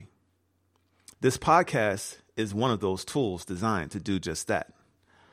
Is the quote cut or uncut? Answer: cut